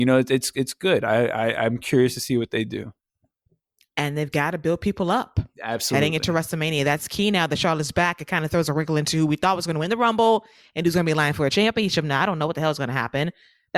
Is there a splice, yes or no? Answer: no